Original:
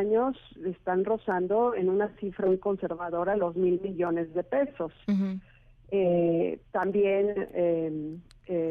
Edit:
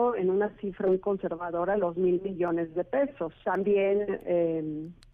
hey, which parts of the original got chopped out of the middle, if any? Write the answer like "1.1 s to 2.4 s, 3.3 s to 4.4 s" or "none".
5.0 s to 6.7 s